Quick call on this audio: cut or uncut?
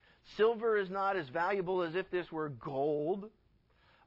uncut